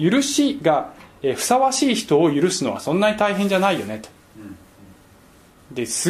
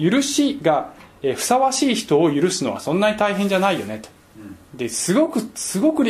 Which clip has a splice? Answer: second; 1 cut; at 4.6 s

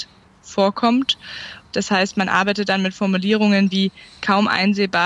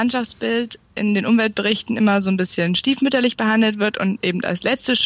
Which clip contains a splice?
first; 1 cut; at 1.7 s

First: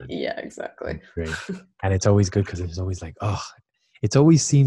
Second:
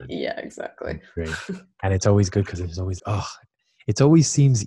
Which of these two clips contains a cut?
second; 1 cut; at 3.0 s

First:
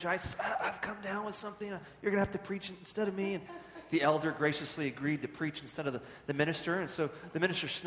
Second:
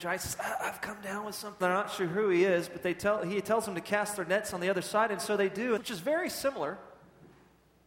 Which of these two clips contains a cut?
second; 2 cuts; at 1.6 s, 5.8 s

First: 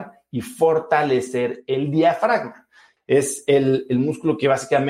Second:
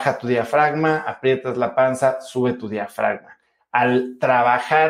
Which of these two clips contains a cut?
first; 1 cut; at 3.0 s

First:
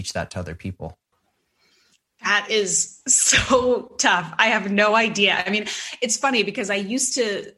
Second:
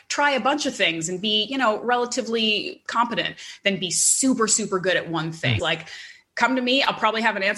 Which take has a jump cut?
second; 1 cut; at 5.6 s

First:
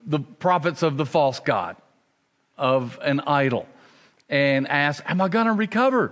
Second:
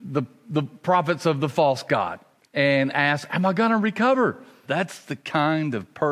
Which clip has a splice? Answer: second; 2 cuts; at 2.4 s, 4.6 s

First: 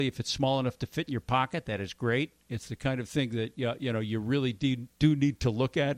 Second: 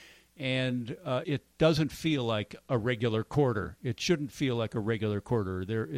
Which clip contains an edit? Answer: second; 1 cut; at 1.2 s

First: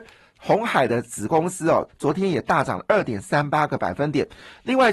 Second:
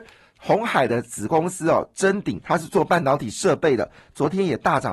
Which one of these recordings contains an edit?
first; 1 cut; at 1.9 s

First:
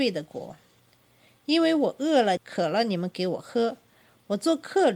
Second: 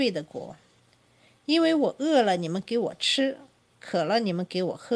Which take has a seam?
first; 1 cut; at 2.4 s

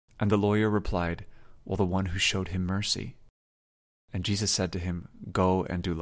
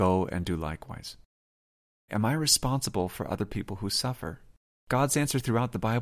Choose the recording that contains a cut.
second; 1 cut; at 2.1 s

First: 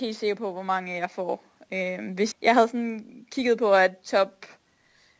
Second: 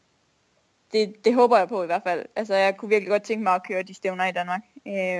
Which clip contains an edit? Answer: first; 1 cut; at 2.3 s

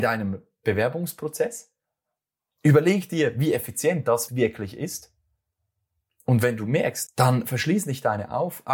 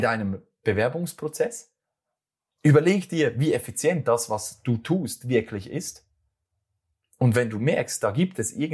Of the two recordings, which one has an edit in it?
first; 2 cuts; at 4.3 s, 7.1 s

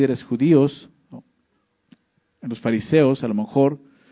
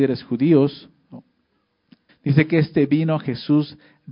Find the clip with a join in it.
second; 1 cut; at 2.1 s

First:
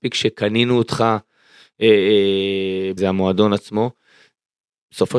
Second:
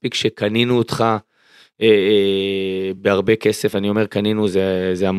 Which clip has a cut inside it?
first; 1 cut; at 3.0 s

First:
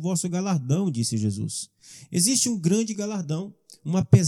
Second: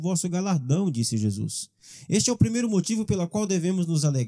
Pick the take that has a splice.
first; 1 cut; at 2.1 s

